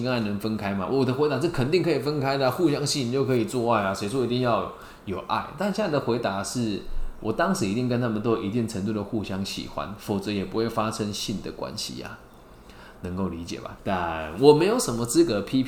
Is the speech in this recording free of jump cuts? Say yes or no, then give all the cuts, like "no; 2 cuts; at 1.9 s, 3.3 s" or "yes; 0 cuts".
no; 1 cut; at 13.8 s